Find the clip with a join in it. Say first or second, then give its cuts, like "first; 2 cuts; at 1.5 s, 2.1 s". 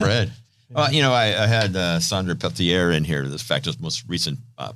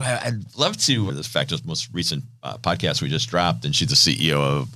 second; 1 cut; at 1.1 s